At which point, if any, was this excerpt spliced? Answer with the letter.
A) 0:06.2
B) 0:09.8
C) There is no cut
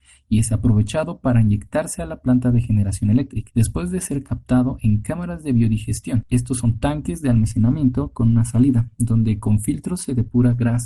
C